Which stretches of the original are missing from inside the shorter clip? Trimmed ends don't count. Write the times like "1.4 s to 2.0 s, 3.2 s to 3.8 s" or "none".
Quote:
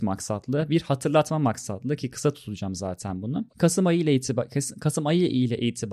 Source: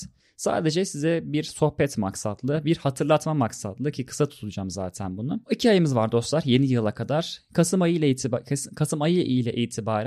5.4 s to 7.4 s